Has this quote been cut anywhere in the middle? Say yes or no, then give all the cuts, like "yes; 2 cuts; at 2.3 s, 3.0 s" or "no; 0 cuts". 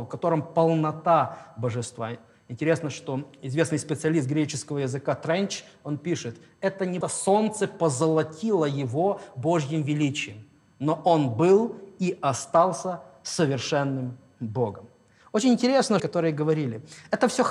yes; 2 cuts; at 7.0 s, 16.0 s